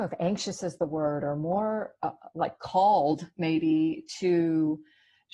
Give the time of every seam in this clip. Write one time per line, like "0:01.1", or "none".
none

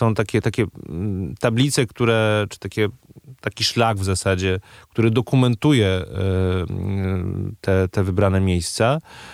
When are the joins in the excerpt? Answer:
none

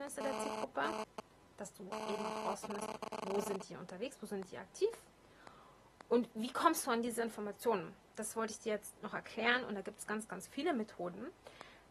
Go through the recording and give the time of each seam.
0:08.1

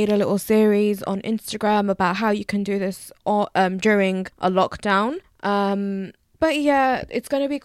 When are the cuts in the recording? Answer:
0:06.3

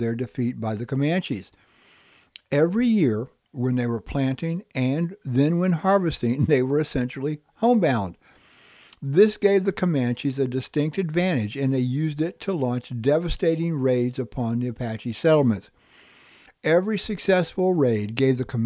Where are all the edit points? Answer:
none

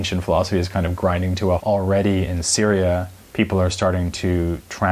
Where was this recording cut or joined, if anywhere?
0:01.6

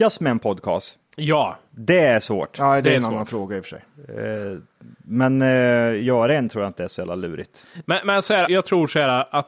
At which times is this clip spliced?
0:08.5

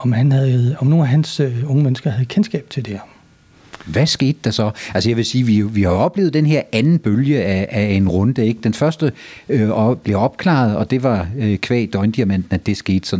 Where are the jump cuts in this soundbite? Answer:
none

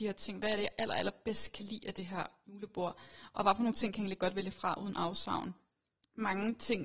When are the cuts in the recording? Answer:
none

